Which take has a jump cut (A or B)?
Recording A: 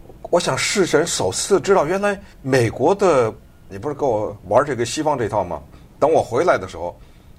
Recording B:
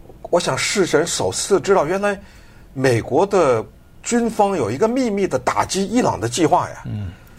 A